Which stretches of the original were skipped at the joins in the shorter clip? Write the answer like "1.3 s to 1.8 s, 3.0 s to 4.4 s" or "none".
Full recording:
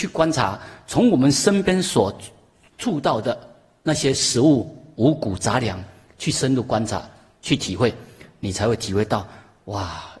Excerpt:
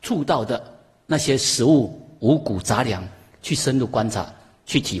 none